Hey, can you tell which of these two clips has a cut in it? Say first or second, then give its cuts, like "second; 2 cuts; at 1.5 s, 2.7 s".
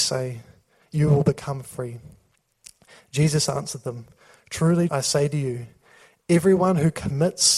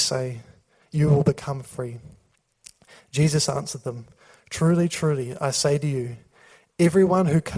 first; 1 cut; at 4.9 s